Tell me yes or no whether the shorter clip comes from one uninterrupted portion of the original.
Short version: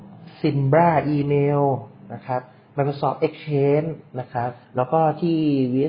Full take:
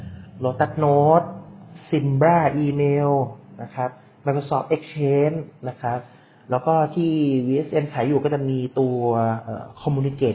no